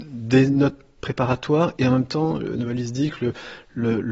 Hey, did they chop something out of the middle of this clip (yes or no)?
no